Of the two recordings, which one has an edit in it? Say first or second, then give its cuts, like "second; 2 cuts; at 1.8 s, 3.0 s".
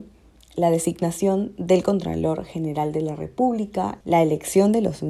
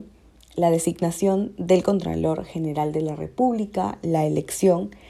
first; 1 cut; at 4.0 s